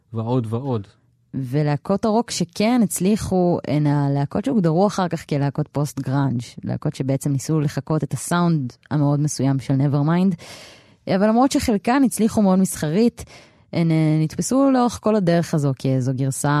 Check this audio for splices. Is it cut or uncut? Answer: uncut